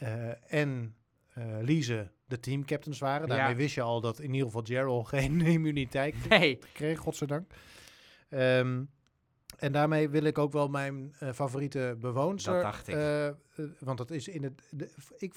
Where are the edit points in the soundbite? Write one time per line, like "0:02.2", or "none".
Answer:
none